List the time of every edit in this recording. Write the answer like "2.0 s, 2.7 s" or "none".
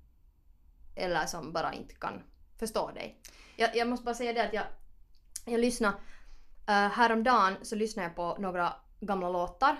none